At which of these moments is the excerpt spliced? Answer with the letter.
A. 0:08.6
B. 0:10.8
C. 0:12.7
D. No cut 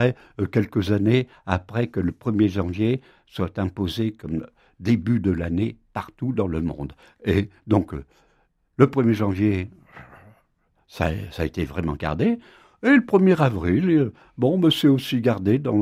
D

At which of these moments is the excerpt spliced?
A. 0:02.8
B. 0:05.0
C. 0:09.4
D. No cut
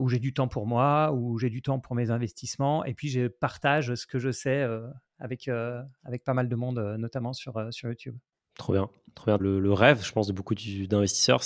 C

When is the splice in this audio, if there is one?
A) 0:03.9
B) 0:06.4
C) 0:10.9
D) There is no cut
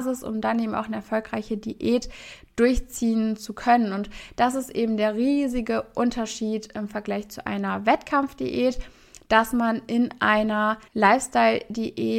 C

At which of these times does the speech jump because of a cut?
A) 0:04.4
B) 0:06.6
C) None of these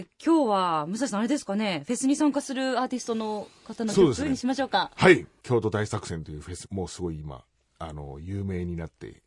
B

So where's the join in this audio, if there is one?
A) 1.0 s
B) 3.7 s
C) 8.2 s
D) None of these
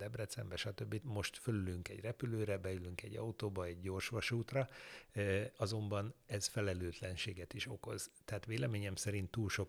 A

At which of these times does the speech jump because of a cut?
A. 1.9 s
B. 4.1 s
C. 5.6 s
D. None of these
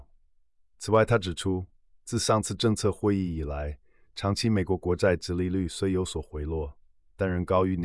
D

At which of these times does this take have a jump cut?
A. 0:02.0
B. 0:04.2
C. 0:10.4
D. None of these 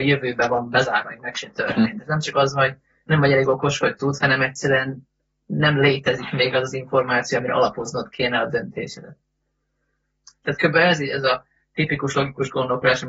C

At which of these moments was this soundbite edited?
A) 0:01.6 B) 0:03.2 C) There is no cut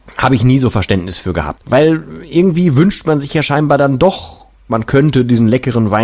A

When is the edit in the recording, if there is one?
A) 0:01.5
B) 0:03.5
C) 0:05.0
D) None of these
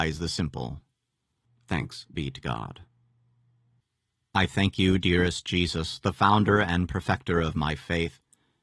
A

